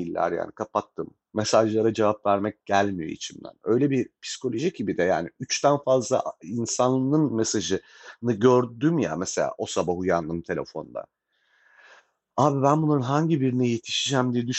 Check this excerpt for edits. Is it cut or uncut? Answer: uncut